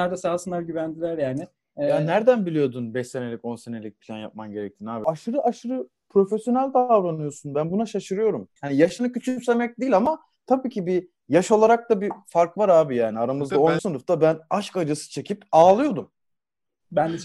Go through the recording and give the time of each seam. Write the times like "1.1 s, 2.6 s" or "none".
8.6 s, 13.8 s